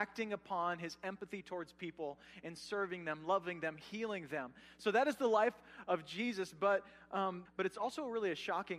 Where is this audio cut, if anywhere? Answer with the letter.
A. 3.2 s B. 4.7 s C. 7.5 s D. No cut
C